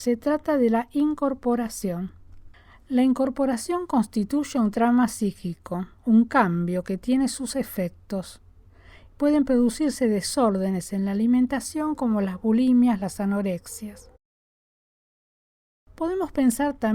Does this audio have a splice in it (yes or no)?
no